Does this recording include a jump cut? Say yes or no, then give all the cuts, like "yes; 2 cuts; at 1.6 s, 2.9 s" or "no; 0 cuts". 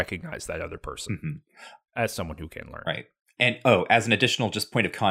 no; 0 cuts